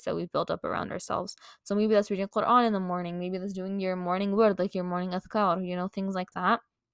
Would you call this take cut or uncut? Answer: uncut